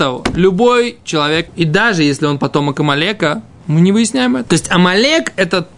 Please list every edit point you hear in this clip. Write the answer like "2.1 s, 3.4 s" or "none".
1.5 s, 4.5 s